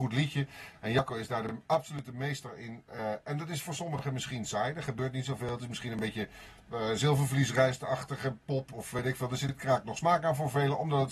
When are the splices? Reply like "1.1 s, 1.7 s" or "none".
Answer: none

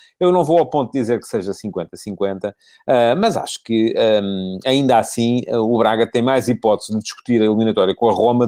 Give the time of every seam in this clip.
none

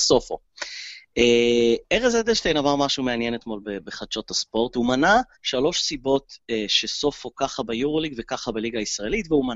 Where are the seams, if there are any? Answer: 5.3 s

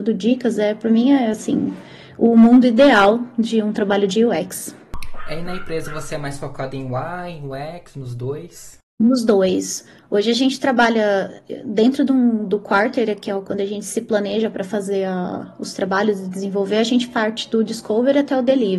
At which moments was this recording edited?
none

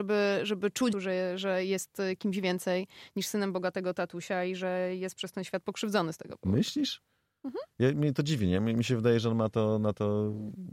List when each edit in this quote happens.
0.9 s

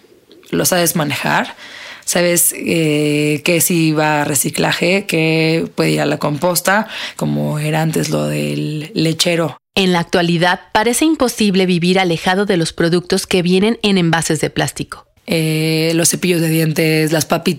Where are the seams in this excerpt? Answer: 7.2 s, 15.2 s

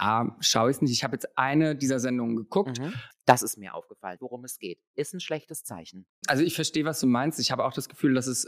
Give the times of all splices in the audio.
3.1 s, 4.2 s, 6.2 s

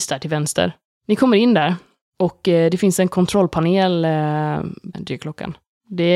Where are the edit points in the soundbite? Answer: 4.9 s

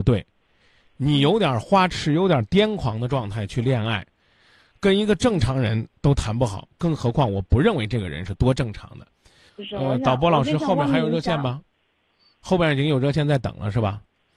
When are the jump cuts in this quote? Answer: 9.5 s

